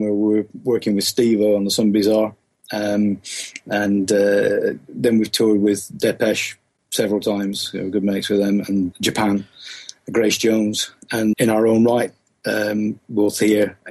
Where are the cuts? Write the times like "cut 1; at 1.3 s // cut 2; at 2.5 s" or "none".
cut 1; at 8.9 s // cut 2; at 11.3 s